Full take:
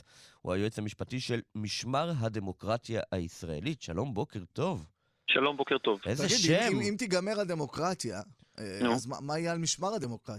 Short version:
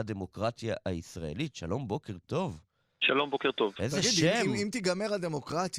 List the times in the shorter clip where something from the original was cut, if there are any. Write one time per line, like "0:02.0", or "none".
none